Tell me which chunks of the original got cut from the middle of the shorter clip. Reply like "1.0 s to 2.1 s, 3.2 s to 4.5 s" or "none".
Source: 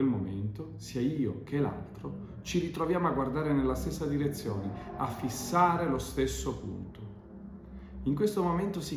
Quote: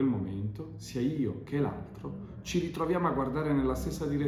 none